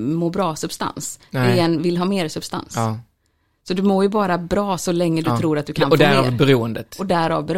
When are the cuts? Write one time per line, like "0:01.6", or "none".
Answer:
none